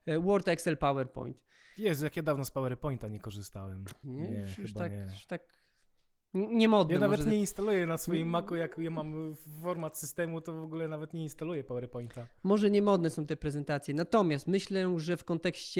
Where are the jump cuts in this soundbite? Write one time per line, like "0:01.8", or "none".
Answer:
0:04.0